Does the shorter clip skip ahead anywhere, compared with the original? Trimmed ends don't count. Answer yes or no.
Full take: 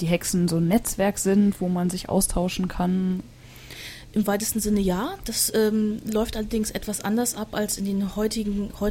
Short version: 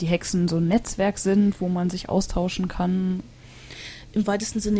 no